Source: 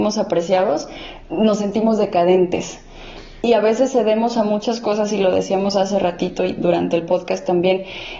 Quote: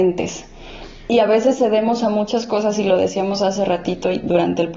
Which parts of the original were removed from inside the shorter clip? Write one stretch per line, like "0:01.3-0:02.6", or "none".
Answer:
none

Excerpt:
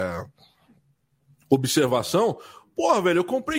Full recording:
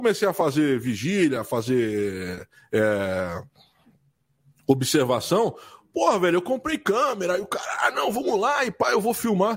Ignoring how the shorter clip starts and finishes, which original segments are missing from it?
none

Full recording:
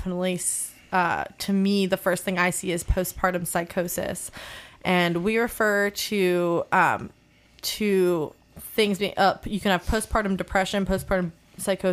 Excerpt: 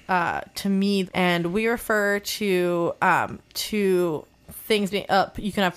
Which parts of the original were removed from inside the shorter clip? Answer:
0:01.9-0:04.8
0:07.2-0:07.6

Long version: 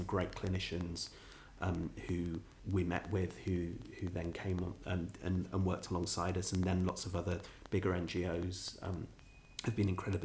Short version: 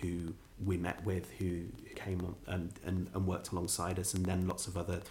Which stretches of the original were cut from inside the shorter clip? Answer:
0:04.0-0:04.3

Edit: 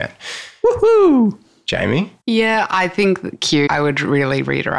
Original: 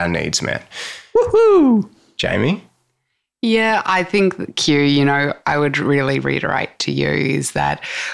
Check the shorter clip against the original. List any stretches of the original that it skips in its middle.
0:02.7-0:03.4
0:04.8-0:05.4

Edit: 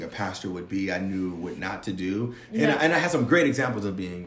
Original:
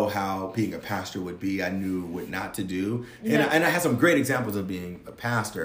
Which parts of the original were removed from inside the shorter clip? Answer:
none

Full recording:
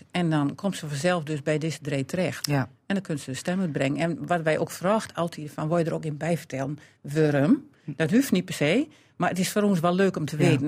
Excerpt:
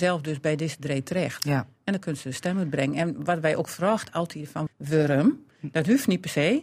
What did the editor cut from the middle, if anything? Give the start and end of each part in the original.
0:05.7-0:06.9

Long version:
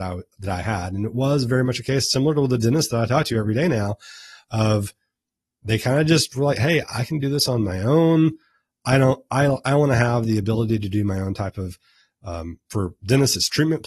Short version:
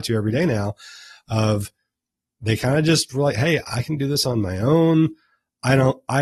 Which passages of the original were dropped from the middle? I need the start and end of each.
none

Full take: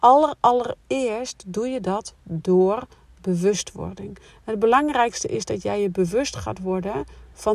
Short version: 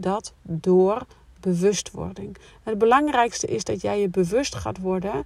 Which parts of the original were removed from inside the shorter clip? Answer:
none

